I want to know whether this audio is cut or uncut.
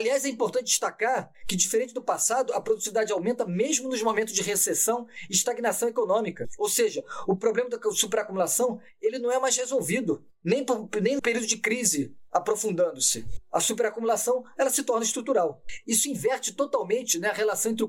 cut